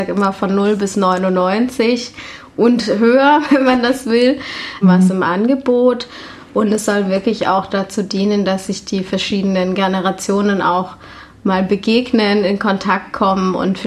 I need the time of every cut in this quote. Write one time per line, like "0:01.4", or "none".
0:04.8